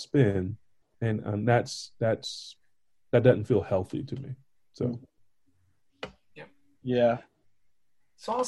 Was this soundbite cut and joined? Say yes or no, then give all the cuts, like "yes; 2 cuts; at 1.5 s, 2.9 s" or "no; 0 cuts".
no; 0 cuts